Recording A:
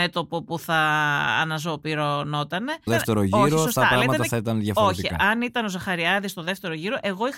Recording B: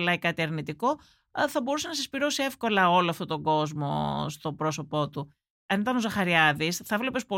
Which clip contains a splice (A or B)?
A